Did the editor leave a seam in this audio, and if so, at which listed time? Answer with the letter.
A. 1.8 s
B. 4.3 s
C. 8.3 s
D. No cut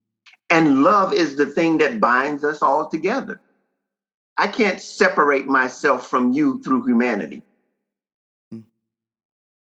B